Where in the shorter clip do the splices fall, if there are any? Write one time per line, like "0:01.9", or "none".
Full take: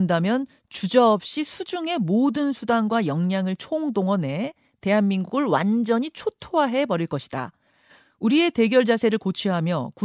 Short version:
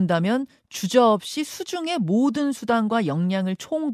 none

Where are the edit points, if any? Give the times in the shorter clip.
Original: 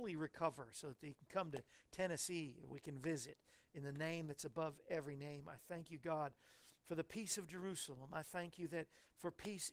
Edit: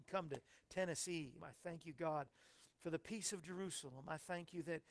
0:01.4

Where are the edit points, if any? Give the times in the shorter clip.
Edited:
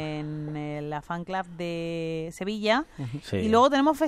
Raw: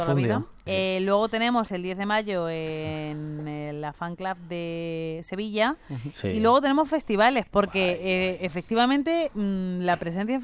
none

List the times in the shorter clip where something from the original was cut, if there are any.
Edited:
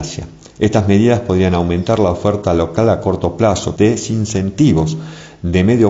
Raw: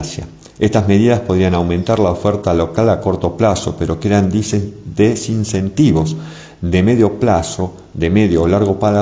0:03.8

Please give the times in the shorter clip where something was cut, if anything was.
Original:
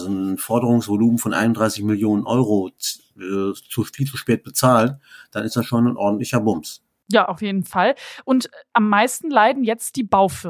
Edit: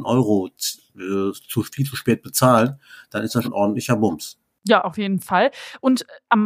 0:03.4

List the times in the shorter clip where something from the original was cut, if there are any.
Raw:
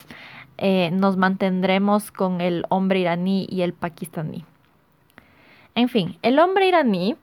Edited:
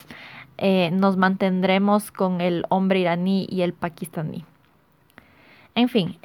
none

